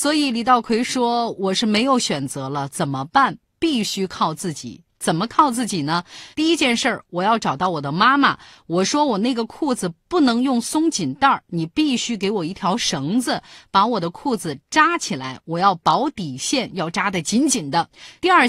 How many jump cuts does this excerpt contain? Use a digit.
1